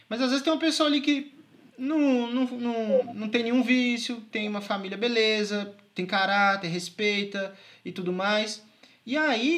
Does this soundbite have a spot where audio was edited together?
no; 0 cuts

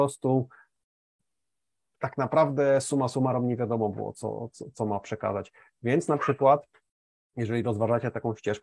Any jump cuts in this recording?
no; 0 cuts

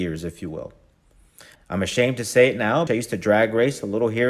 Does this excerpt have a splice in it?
yes; 2 cuts; at 1.6 s, 2.9 s

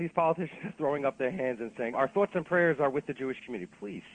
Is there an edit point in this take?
yes; 1 cut; at 1.9 s

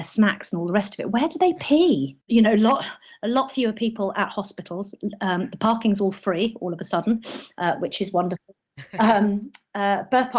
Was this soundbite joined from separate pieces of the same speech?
yes; 1 cut; at 2.3 s

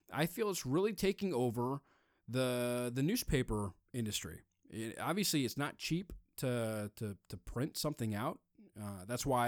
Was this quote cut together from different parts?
no; 0 cuts

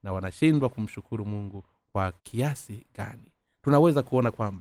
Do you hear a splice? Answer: yes; 1 cut; at 2.2 s

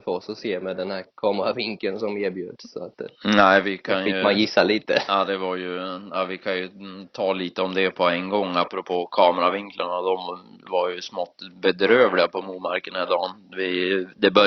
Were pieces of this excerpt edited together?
no; 0 cuts

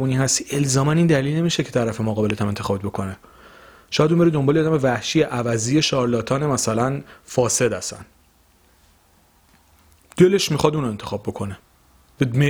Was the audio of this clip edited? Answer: no; 0 cuts

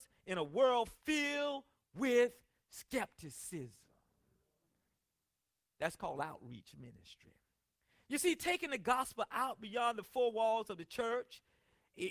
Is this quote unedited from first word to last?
yes; 0 cuts

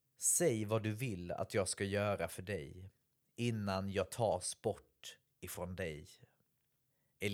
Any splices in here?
no; 0 cuts

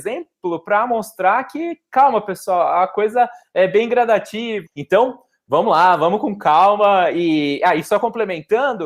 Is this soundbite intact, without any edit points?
no; 1 cut; at 4.7 s

